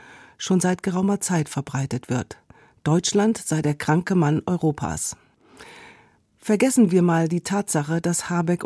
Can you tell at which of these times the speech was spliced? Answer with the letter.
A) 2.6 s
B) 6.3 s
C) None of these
C